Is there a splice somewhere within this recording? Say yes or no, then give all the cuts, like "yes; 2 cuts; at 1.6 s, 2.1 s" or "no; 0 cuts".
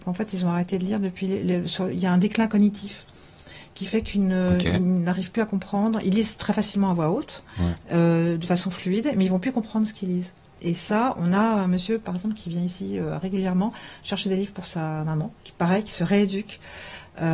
yes; 1 cut; at 15.4 s